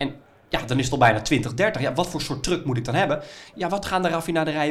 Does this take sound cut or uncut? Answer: cut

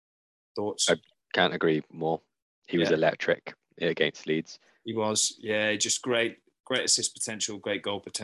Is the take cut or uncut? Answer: uncut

